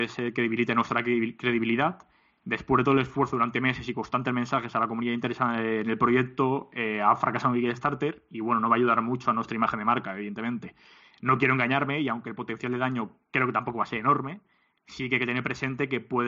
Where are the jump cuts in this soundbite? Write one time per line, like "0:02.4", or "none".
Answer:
none